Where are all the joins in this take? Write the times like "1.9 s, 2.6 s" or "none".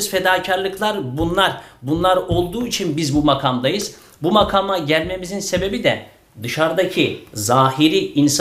none